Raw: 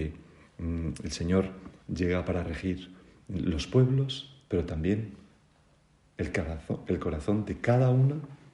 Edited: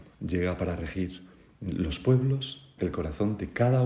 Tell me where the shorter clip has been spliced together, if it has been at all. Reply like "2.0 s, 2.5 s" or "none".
2.8 s